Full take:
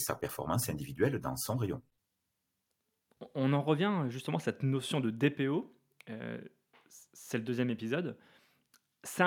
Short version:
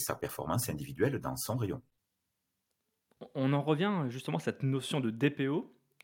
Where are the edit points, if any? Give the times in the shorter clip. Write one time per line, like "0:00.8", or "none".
none